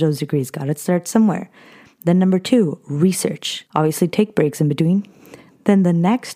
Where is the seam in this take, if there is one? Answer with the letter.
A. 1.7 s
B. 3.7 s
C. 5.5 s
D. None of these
B